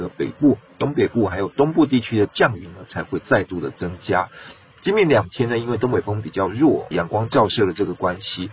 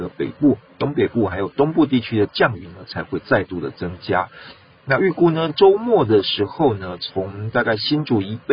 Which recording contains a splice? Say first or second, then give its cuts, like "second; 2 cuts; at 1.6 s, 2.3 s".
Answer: first; 2 cuts; at 4.7 s, 6.9 s